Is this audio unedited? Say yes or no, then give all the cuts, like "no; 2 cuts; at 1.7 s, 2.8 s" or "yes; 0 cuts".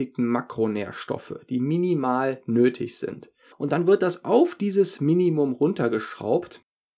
no; 1 cut; at 3.5 s